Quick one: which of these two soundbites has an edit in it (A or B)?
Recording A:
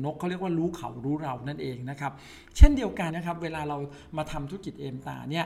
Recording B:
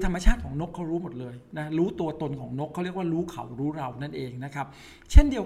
A